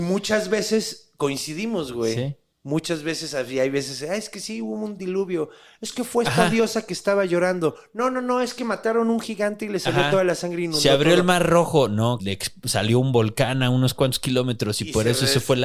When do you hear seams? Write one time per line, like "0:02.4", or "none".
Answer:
0:12.2